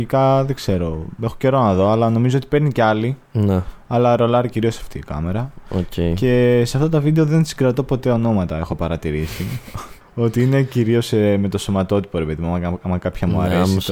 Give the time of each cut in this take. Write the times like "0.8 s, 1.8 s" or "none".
none